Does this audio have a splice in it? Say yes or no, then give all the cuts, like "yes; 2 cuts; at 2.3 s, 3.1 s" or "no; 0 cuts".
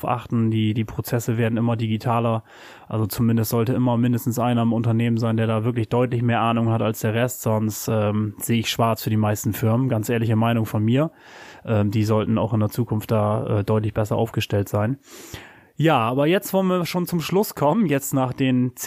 no; 0 cuts